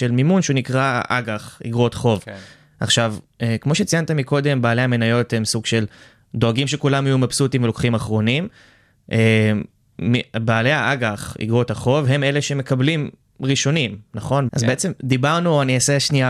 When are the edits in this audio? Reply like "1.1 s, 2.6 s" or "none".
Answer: 14.5 s